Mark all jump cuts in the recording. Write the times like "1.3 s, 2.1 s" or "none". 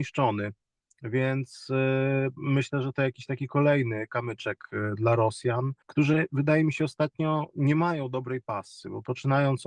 5.8 s